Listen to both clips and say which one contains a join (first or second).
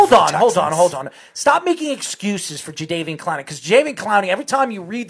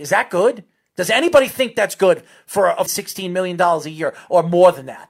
second